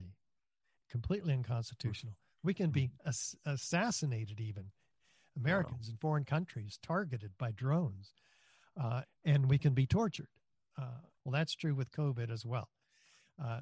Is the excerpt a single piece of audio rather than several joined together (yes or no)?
no